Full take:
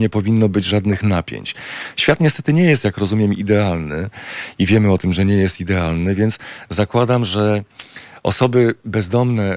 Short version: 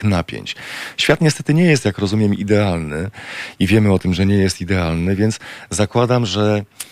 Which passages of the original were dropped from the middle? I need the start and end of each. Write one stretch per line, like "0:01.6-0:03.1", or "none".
none

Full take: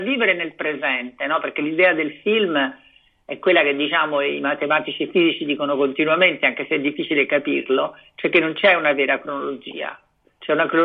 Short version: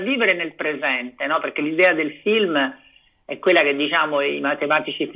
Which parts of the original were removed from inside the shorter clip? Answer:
none

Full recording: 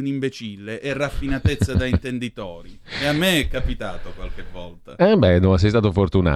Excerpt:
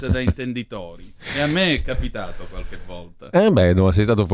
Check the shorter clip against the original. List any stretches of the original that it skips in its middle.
none

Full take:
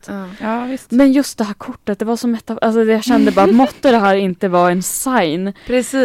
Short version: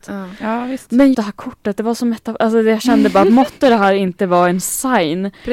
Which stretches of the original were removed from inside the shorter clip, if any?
0:01.1-0:01.4

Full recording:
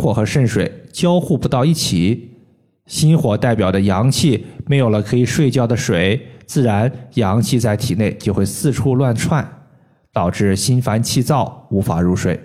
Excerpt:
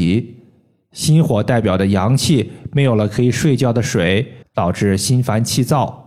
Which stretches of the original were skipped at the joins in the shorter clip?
0:06.4-0:10.0

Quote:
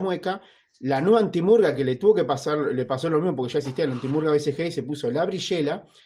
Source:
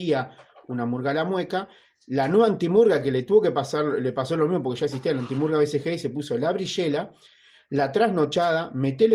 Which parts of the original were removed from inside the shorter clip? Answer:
none

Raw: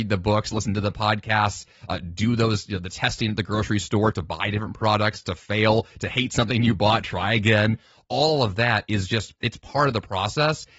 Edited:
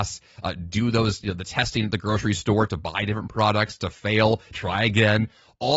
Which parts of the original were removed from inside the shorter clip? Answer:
0:06.0-0:07.0

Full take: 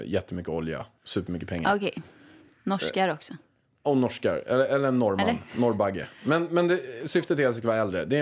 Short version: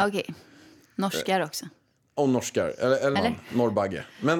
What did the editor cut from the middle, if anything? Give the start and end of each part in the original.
0:04.8-0:05.2

